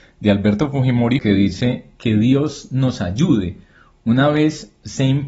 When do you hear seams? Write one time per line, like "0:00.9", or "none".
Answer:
0:01.2